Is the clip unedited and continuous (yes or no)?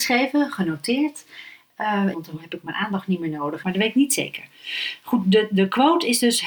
no